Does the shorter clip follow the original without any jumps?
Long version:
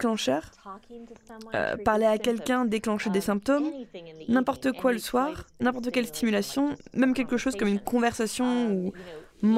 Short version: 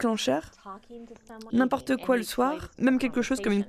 no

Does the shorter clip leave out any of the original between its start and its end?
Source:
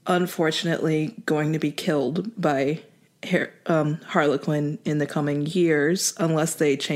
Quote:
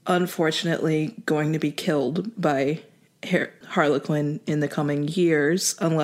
yes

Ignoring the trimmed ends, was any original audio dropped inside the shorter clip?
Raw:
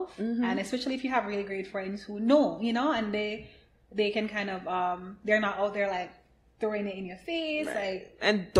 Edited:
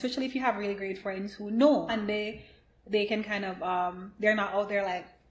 yes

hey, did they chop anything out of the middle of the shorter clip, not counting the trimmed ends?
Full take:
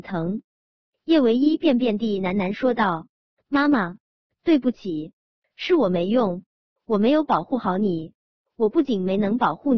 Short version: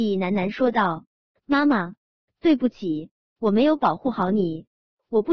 yes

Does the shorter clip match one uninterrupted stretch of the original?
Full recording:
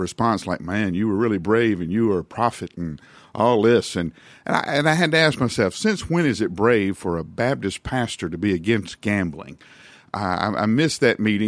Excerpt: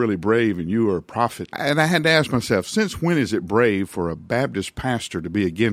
no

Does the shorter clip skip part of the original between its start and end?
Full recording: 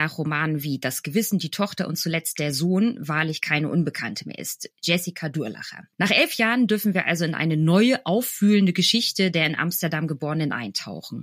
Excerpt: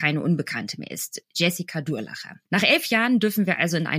no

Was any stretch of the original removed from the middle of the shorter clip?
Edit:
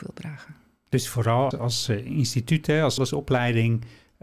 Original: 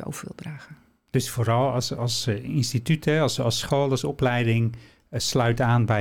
yes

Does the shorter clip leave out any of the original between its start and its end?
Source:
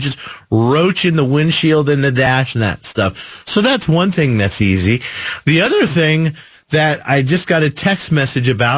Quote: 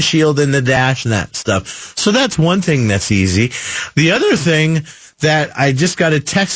no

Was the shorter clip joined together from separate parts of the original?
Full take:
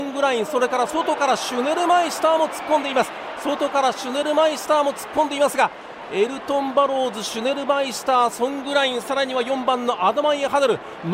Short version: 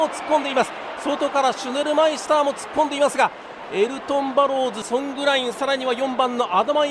yes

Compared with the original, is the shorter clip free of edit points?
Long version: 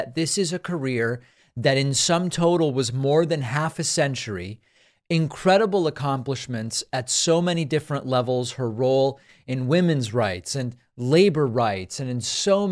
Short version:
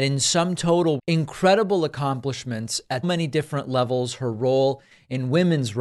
no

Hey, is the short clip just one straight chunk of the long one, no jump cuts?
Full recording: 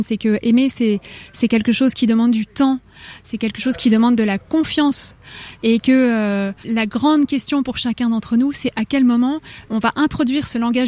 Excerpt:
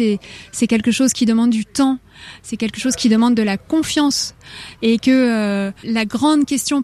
yes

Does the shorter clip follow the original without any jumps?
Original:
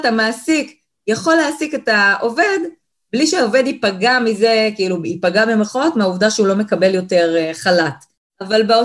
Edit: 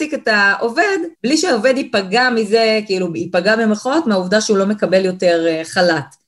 no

